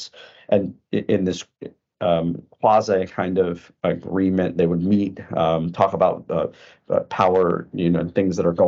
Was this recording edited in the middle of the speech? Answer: no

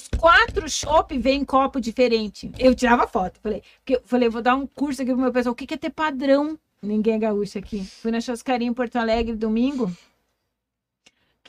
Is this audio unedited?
no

